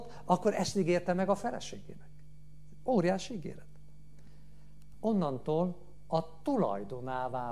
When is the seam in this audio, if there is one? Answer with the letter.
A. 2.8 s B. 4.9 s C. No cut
B